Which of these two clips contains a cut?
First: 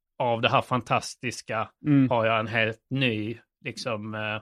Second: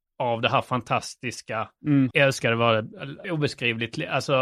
second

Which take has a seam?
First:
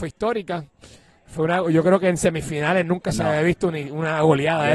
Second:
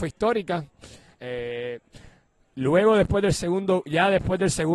second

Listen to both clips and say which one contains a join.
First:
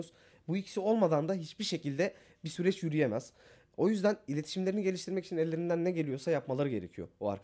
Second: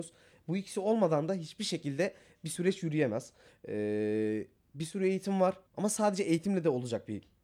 second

